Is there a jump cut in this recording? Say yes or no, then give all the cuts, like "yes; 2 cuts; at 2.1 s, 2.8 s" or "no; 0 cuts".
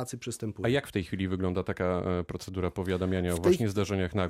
no; 0 cuts